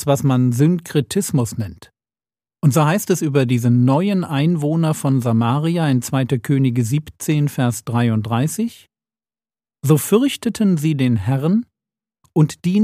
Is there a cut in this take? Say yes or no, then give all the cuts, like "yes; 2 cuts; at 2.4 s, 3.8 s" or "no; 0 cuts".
no; 0 cuts